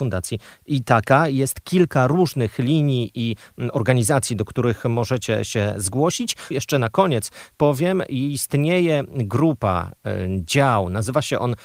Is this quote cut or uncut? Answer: cut